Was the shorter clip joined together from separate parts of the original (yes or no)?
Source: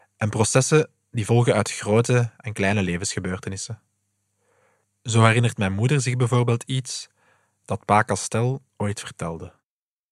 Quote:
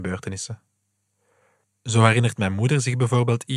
no